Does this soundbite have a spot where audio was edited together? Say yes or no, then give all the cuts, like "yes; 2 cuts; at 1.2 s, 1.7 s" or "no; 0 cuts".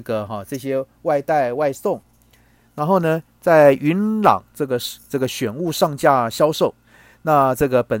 no; 0 cuts